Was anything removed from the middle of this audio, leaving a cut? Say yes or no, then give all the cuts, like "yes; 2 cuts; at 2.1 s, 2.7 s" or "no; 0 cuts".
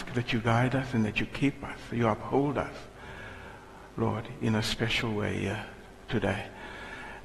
no; 0 cuts